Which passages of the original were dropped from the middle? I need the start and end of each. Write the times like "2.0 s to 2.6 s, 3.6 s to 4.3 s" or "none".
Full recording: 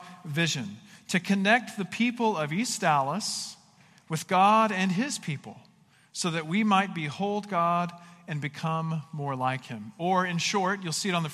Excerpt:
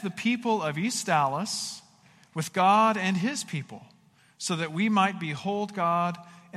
none